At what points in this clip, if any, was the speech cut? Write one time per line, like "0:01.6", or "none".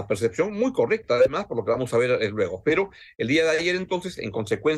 none